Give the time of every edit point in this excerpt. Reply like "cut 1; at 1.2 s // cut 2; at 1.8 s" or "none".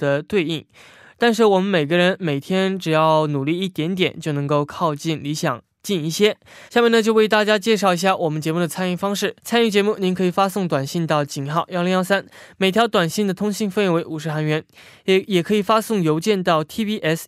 cut 1; at 6.7 s // cut 2; at 9.4 s